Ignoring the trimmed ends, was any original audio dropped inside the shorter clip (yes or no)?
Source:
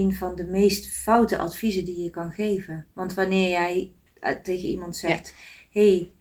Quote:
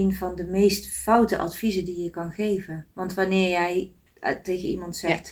no